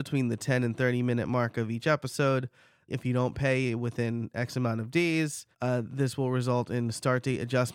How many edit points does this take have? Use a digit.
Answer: 2